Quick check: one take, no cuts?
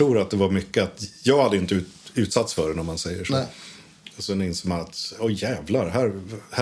yes; 0 cuts

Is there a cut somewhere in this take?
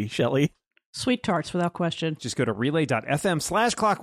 yes; 1 cut; at 2.2 s

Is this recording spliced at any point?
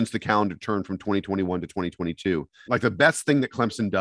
yes; 1 cut; at 2.7 s

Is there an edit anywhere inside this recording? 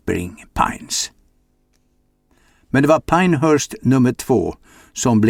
no; 0 cuts

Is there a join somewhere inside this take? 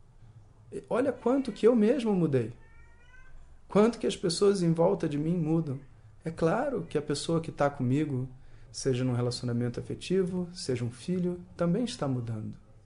yes; 1 cut; at 8.7 s

